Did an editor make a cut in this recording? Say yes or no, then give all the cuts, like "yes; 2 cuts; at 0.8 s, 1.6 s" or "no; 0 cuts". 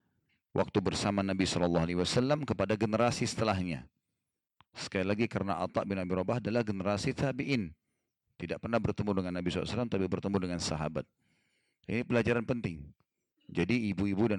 no; 0 cuts